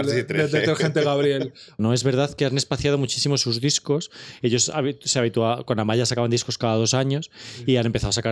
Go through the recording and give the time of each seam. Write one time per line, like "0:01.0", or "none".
0:01.8